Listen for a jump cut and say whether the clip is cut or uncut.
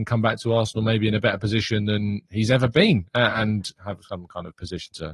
uncut